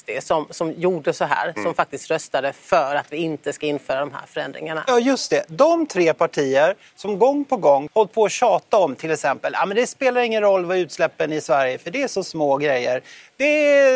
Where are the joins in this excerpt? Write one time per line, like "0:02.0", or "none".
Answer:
0:07.9